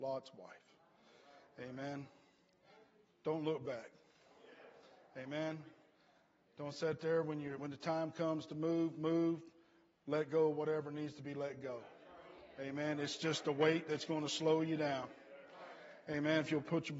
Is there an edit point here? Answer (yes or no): yes